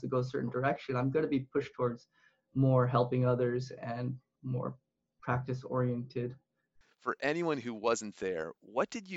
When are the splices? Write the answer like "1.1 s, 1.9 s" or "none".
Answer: 6.8 s